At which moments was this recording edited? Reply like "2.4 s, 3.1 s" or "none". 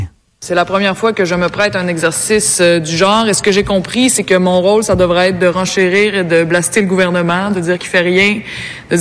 none